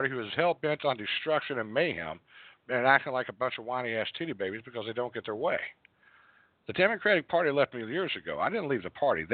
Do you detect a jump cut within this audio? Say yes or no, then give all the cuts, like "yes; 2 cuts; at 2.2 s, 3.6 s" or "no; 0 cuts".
no; 0 cuts